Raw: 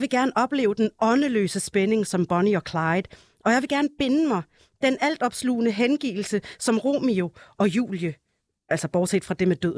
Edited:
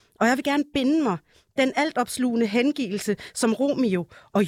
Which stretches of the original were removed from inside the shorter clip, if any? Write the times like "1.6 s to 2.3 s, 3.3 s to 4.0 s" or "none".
none